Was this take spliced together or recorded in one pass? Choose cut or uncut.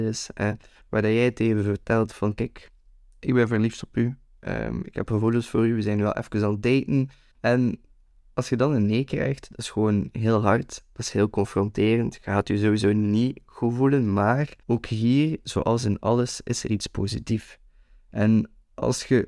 cut